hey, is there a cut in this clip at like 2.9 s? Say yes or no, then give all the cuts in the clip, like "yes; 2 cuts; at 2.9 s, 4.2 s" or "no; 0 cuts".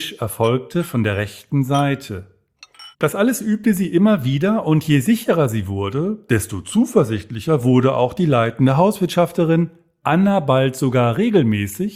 yes; 1 cut; at 2.9 s